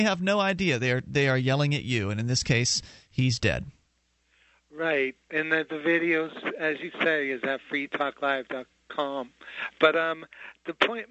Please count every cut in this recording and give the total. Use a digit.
0